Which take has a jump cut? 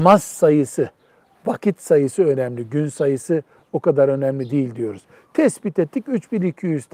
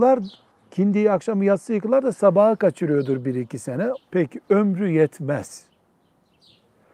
second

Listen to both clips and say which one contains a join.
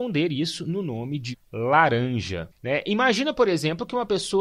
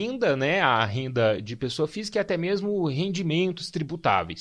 first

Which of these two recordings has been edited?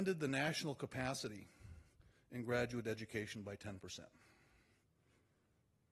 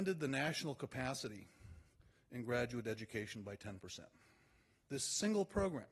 second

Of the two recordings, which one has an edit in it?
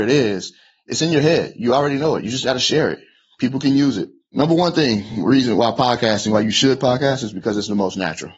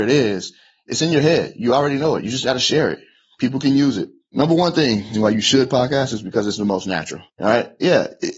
second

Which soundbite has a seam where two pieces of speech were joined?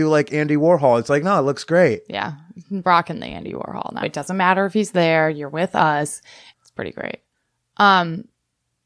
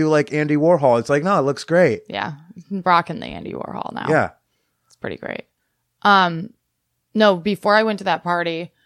first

